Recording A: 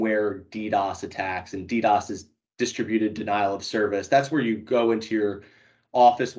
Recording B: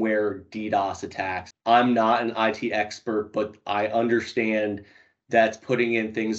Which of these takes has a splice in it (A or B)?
B